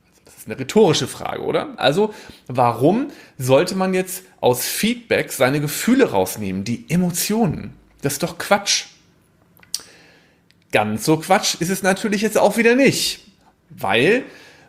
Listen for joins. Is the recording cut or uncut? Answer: cut